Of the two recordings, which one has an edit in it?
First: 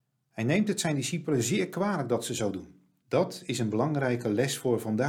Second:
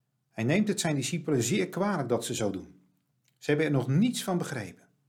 first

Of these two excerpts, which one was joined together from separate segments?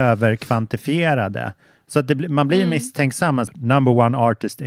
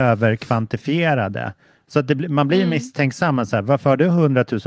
first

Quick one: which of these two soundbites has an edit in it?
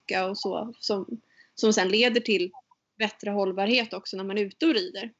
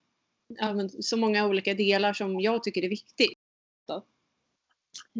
second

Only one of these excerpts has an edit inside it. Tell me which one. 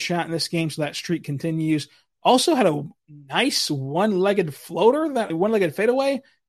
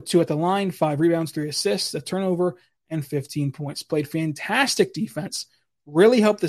first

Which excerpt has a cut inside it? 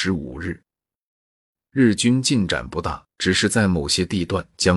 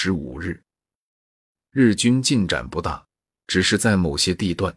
first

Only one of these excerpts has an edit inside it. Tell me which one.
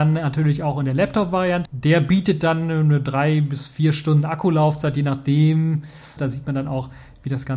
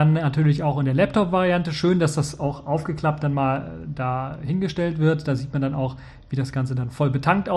first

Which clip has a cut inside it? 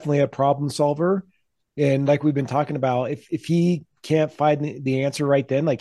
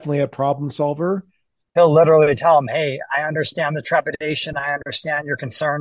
second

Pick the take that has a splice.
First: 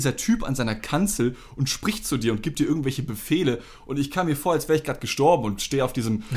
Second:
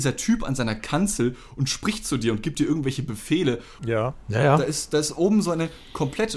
second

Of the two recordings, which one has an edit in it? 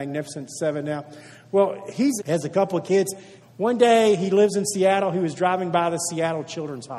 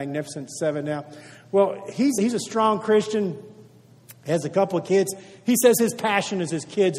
first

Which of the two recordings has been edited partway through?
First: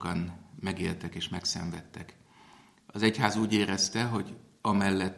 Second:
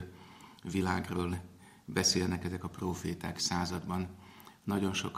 second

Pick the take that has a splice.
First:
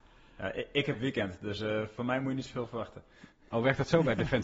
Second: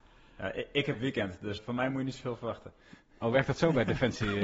second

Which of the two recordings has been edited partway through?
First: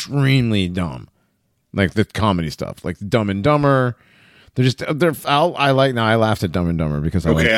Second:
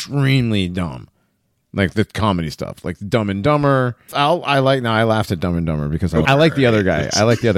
second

